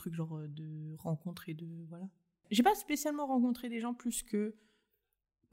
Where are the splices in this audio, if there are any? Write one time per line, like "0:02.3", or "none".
none